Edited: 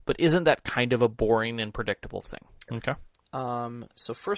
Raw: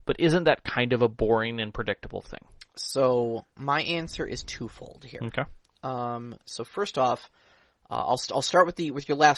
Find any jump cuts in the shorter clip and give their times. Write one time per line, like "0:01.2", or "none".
0:02.7